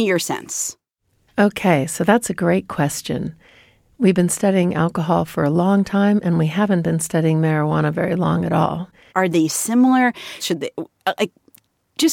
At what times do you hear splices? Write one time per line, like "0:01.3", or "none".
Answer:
0:09.1
0:10.4